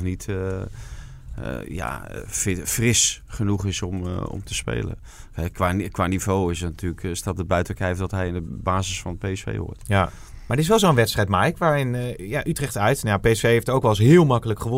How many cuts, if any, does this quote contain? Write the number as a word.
one